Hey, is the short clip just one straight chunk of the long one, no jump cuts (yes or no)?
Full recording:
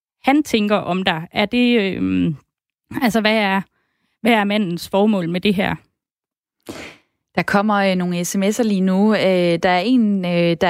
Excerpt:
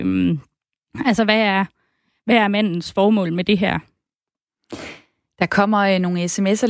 yes